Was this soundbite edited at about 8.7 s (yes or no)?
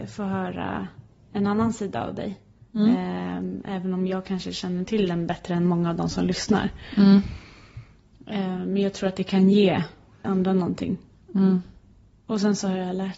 no